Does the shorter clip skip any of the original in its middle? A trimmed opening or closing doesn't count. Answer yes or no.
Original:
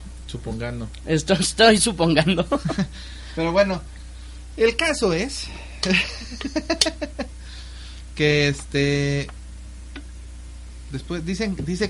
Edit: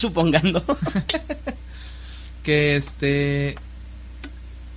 yes